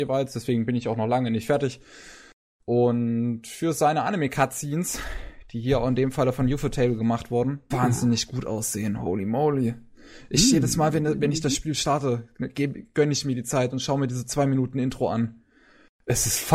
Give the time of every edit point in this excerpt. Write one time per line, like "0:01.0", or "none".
0:07.7